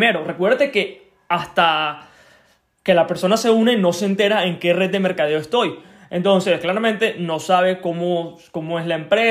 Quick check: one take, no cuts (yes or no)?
yes